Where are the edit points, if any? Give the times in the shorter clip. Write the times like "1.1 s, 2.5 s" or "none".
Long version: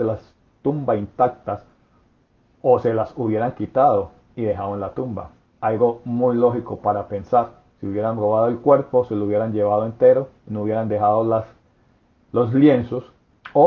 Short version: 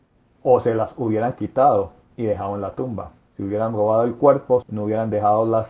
3.2 s, 4.6 s